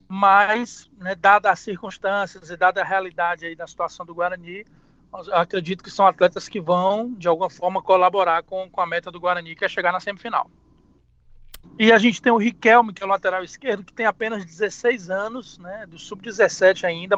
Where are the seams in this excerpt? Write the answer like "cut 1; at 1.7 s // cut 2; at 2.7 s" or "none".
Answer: cut 1; at 11.6 s